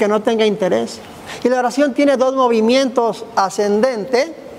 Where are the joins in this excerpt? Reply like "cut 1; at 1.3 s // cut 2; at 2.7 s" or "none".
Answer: none